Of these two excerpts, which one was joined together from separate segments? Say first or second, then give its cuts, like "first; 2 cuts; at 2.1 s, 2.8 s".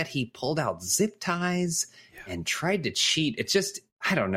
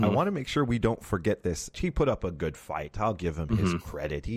second; 1 cut; at 1.7 s